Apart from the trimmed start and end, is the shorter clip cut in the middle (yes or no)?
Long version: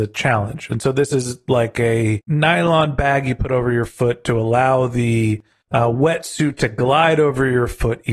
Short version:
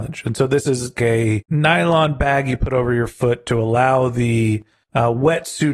yes